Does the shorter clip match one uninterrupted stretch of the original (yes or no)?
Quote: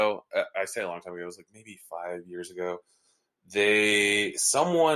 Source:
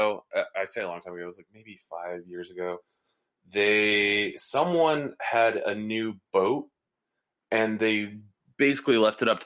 yes